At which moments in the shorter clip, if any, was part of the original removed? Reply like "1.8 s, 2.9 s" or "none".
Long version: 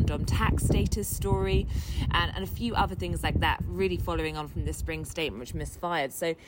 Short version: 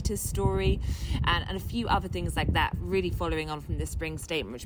none